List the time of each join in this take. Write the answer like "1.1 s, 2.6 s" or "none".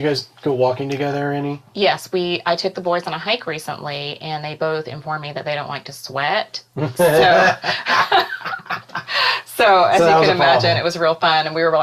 none